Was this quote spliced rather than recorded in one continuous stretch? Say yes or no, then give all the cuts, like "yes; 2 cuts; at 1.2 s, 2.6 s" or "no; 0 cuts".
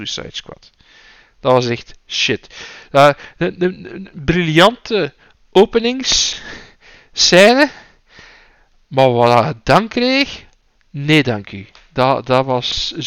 no; 0 cuts